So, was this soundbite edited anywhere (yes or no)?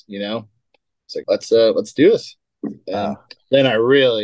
yes